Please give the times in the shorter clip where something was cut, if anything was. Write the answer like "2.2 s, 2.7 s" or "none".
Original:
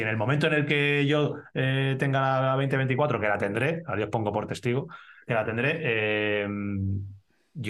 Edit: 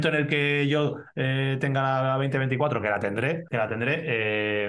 3.5 s